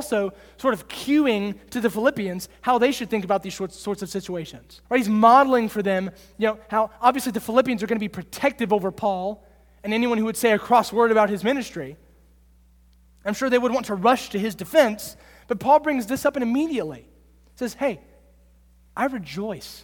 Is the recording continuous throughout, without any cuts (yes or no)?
no